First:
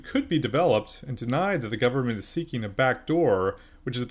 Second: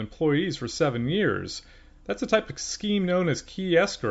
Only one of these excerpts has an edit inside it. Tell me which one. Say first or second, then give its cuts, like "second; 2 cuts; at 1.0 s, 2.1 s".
second; 1 cut; at 1.9 s